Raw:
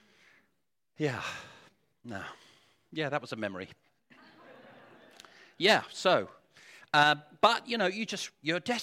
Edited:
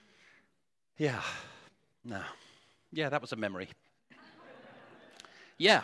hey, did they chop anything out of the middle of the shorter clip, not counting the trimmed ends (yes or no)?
no